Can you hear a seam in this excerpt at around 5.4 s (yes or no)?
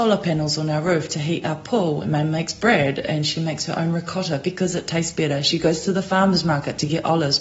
no